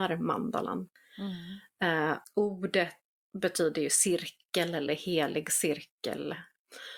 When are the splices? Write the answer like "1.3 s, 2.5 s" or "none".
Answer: 2.2 s